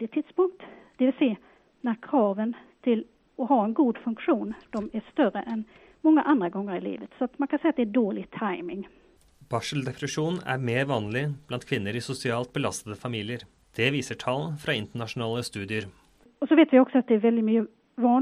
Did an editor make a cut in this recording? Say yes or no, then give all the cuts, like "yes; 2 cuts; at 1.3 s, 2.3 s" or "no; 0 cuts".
no; 0 cuts